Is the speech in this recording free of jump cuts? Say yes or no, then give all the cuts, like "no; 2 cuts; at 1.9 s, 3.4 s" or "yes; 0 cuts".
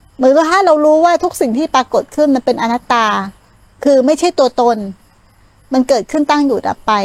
yes; 0 cuts